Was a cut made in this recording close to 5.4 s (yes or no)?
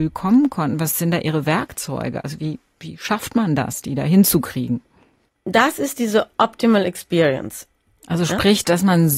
yes